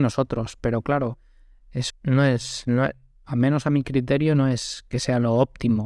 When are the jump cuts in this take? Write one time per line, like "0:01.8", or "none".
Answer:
0:01.9

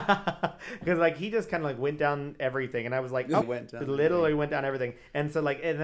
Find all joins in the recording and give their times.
0:03.4

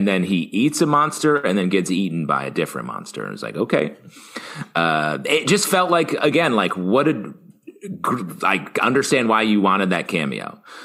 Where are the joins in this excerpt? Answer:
none

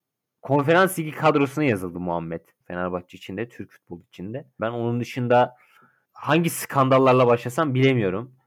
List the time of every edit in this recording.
0:02.6
0:04.6

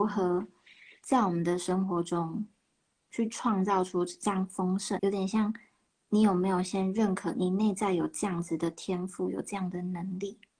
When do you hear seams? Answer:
0:05.0

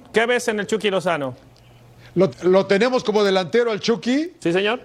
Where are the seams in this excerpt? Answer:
0:02.3

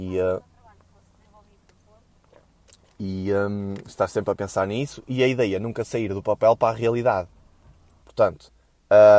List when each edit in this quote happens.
0:08.0

